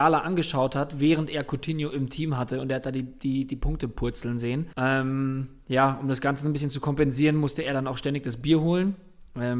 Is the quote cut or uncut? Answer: cut